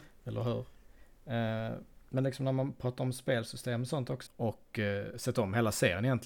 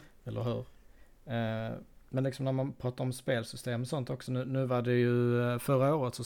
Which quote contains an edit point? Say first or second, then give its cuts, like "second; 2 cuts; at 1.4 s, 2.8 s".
first; 1 cut; at 4.3 s